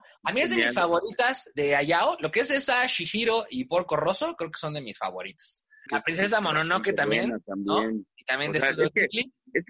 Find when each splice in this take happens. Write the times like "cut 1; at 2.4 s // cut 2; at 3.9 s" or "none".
cut 1; at 5.9 s